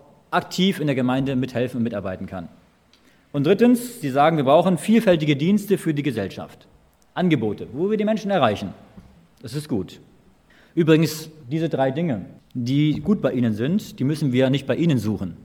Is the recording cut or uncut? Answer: uncut